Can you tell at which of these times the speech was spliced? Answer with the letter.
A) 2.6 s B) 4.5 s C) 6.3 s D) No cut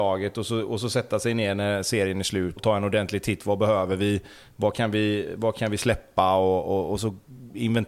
A